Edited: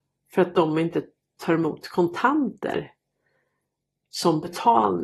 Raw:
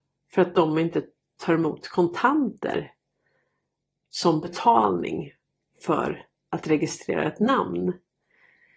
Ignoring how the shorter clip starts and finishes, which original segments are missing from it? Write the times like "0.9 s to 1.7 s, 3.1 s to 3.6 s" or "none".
none